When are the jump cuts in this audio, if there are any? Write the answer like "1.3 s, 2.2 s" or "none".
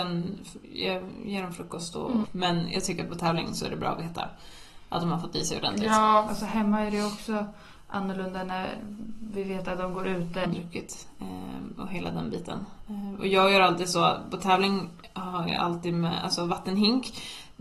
2.2 s, 6.3 s, 10.4 s